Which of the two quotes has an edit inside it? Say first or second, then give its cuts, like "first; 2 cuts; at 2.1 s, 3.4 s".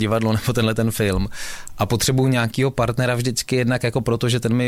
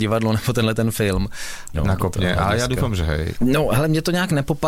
second; 2 cuts; at 1.7 s, 3.4 s